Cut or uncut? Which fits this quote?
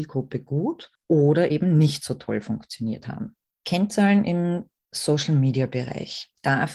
uncut